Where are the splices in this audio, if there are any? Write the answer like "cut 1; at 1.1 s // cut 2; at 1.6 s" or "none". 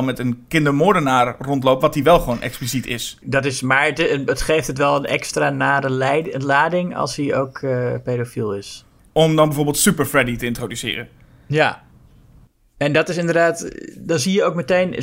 cut 1; at 3.2 s // cut 2; at 9.0 s